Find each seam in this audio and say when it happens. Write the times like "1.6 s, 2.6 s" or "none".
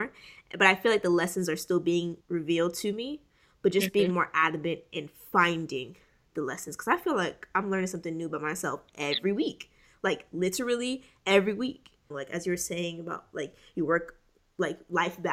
2.2 s, 12.1 s